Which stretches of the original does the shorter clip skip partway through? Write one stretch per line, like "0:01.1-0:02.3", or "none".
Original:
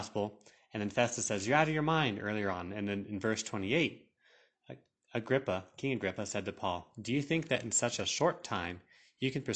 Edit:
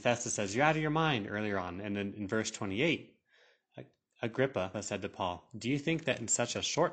0:05.7-0:06.2